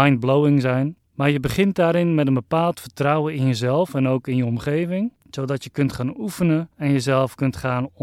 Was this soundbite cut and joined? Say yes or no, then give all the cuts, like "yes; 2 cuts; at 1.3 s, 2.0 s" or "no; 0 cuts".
no; 0 cuts